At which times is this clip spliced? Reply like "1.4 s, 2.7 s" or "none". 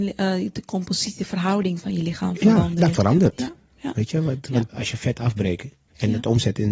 4.7 s